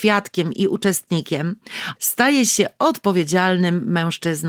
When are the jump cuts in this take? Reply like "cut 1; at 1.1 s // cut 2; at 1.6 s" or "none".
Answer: cut 1; at 2.0 s